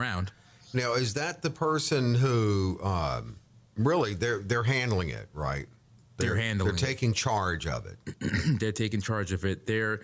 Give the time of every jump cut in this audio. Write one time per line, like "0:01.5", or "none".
none